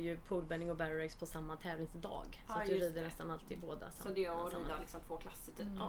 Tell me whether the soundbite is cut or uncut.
uncut